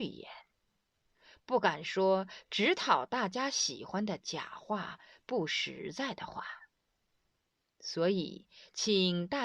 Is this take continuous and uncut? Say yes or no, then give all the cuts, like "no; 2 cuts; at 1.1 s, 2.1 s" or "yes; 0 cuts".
yes; 0 cuts